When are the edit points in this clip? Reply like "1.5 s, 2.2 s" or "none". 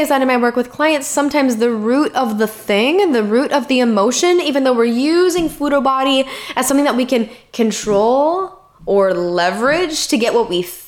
none